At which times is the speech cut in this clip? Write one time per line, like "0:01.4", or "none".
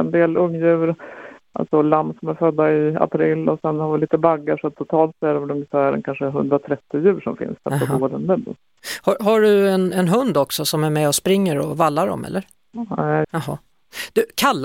0:13.2